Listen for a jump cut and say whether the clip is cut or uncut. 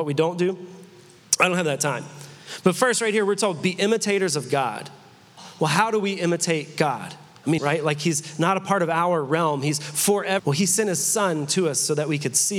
cut